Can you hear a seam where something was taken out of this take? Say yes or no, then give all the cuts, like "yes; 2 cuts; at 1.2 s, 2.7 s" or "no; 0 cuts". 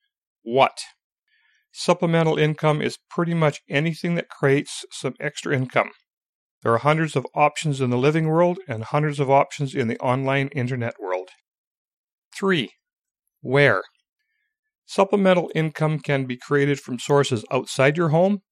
no; 0 cuts